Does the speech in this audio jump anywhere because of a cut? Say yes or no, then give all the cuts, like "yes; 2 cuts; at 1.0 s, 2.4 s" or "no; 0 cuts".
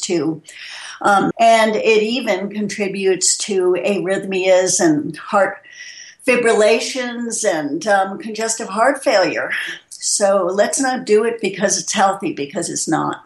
yes; 1 cut; at 1.3 s